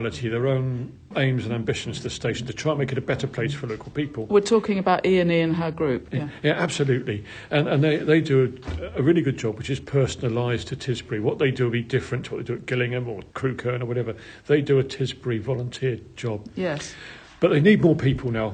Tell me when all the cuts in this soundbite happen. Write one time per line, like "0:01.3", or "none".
0:13.3